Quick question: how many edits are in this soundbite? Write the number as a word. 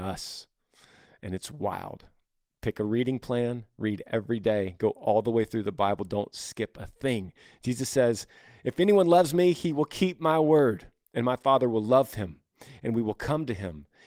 zero